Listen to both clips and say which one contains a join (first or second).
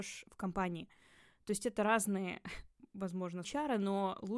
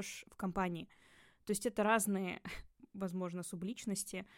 first